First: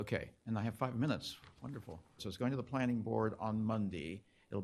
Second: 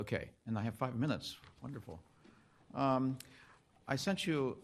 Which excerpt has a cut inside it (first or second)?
first